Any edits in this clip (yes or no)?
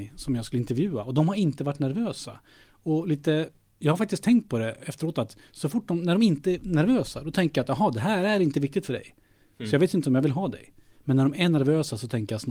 no